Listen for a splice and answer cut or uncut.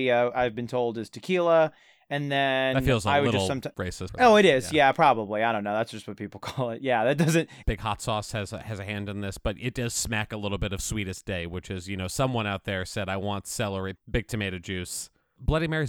cut